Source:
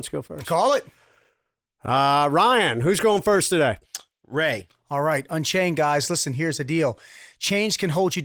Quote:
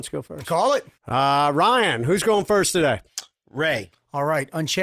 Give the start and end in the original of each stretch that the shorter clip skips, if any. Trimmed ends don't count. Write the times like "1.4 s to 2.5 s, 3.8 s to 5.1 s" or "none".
0.9 s to 1.7 s

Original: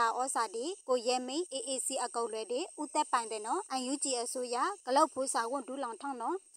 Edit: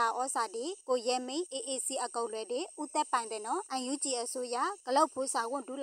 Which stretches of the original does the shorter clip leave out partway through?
none

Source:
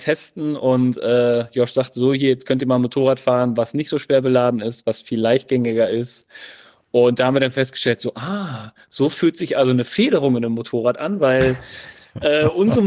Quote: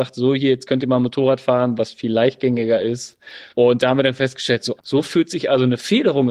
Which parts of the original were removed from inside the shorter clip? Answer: 3.6 s to 4.8 s, 6.6 s to 6.9 s, 8.1 s to 8.8 s

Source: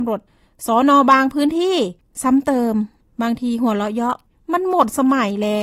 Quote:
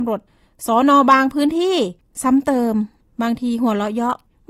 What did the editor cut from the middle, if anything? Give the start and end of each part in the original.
none

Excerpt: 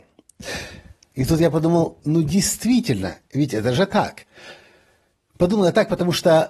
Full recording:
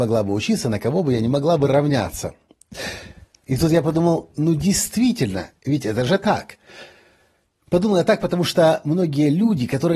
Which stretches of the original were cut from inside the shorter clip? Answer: none

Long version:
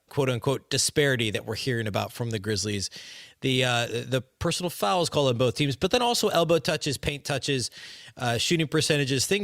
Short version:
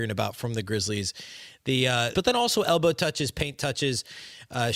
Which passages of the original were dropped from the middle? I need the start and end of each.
3.9 s to 5.8 s

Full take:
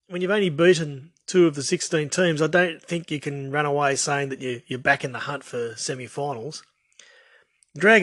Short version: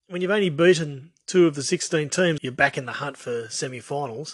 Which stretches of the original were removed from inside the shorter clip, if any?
2.4 s to 4.6 s

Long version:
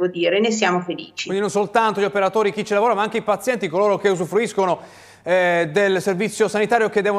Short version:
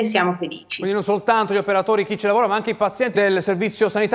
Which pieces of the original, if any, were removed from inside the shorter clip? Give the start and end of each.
3.6 s to 5.7 s

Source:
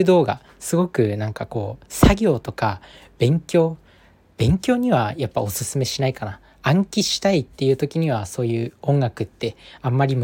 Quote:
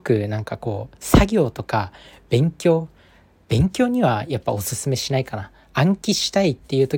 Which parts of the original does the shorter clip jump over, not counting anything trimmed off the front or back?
none

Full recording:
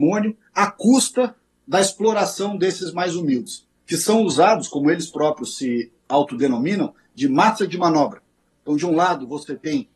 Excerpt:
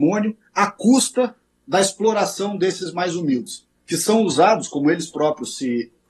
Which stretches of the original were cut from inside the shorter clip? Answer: none

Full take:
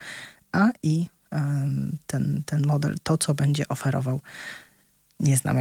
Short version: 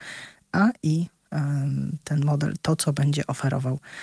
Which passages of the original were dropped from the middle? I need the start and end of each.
2.0 s to 2.4 s

